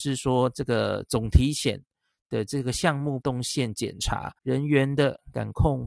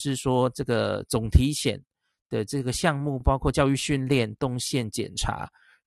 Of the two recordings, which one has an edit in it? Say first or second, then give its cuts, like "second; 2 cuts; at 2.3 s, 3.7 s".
first; 2 cuts; at 3.2 s, 4.4 s